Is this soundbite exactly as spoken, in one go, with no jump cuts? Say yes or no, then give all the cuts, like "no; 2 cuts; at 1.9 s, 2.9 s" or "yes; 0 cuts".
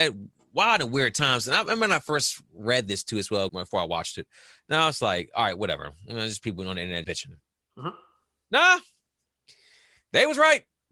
no; 2 cuts; at 3.5 s, 7.0 s